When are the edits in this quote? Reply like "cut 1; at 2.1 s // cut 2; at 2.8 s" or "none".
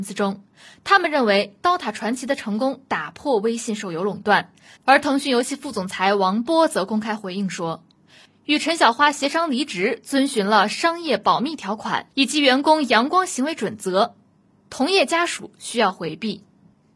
cut 1; at 4.8 s